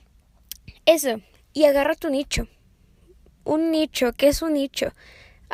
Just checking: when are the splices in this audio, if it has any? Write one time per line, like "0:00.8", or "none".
none

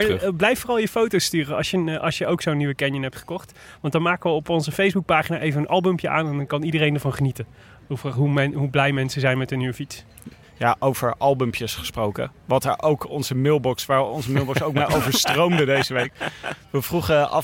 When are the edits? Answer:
none

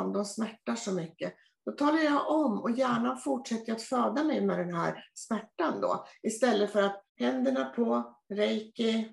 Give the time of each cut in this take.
0:07.1

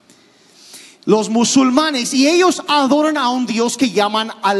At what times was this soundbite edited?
none

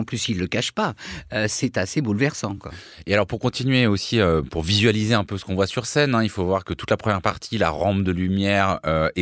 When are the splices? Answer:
none

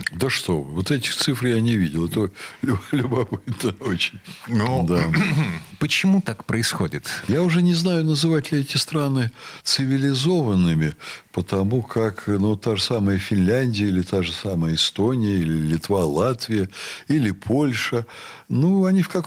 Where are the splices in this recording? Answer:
0:07.3

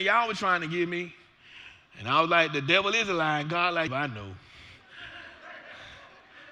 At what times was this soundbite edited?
0:03.9

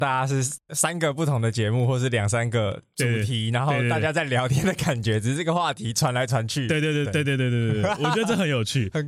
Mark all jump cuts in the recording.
0:07.0

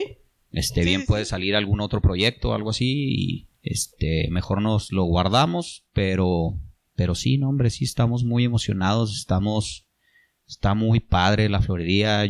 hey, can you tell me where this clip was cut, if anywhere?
0:03.5

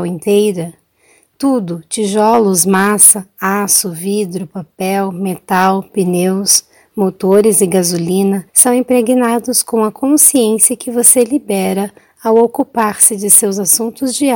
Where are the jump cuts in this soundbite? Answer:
0:08.5

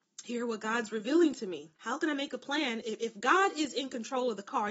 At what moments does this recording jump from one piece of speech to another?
0:01.8
0:02.8

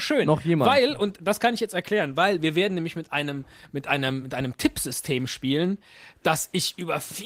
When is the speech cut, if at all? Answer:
none

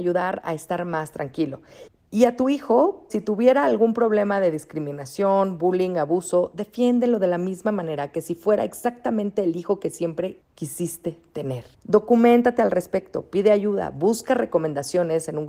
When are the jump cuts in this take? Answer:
0:03.1

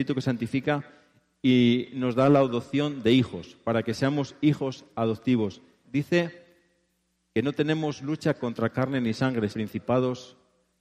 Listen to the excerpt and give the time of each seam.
0:05.8
0:09.5

